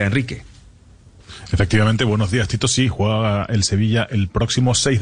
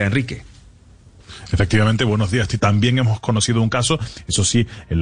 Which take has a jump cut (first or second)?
second